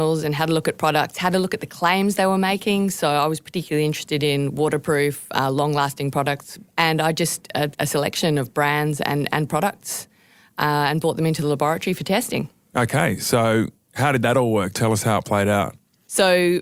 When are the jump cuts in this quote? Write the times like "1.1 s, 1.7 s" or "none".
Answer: 7.7 s